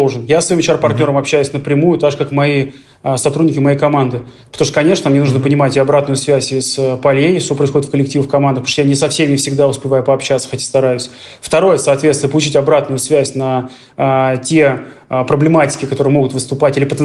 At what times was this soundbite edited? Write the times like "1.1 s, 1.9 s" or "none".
none